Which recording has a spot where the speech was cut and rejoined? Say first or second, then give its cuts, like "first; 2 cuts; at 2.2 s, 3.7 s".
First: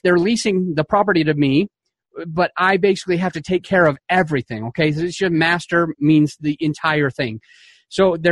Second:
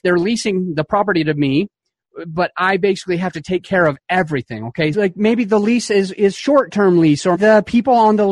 second; 2 cuts; at 4.9 s, 7.3 s